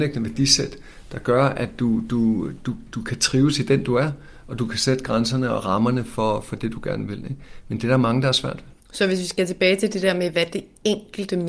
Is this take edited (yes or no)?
yes